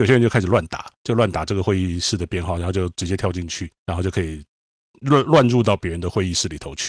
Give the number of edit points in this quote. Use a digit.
1